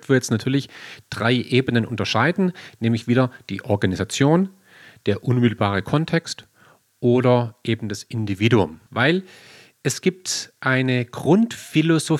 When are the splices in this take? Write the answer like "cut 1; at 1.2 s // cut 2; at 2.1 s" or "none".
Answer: cut 1; at 8.9 s